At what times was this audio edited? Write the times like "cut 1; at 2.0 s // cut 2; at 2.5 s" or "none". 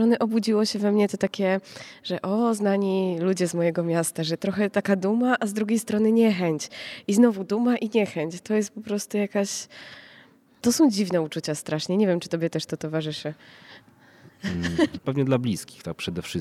cut 1; at 15.0 s